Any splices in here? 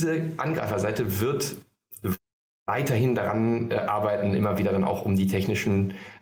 no; 0 cuts

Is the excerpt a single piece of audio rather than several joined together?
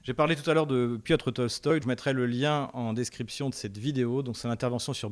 no; 1 cut; at 1.8 s

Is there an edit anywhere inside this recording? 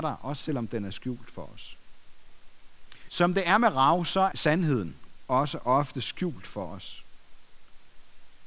yes; 2 cuts; at 3.1 s, 4.3 s

